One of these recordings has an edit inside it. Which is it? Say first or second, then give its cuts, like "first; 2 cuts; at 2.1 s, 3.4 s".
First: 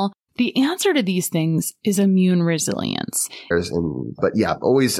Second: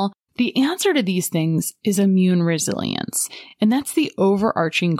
first; 1 cut; at 3.5 s